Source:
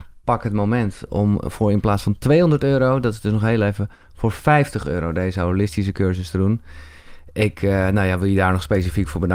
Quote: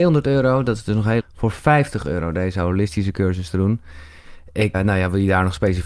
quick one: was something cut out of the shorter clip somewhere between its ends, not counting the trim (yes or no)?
yes